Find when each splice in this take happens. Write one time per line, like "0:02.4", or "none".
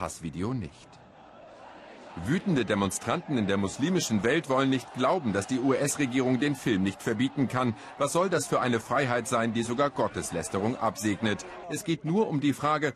0:11.6